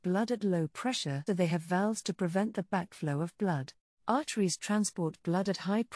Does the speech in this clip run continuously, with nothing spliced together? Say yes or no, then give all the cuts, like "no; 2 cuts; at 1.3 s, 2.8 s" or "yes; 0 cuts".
no; 2 cuts; at 1.3 s, 3.9 s